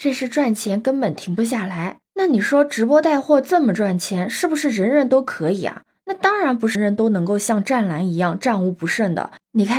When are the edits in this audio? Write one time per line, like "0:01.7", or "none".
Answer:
0:06.7